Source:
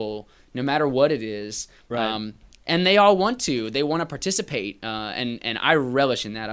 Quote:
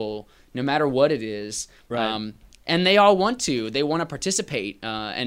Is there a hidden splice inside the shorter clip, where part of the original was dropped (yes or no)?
no